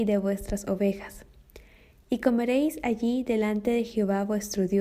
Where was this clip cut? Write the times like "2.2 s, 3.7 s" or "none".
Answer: none